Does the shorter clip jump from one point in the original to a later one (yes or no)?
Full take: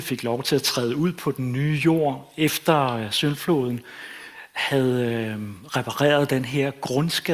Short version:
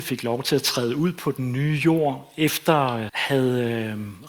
yes